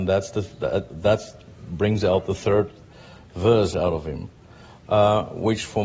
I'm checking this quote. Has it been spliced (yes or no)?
no